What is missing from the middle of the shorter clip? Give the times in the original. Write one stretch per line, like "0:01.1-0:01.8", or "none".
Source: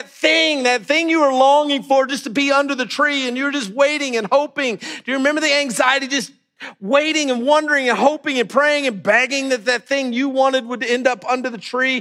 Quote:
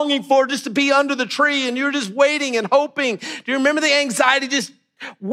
none